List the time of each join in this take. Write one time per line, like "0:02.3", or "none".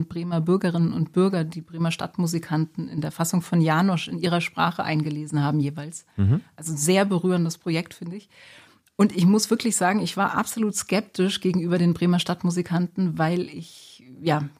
none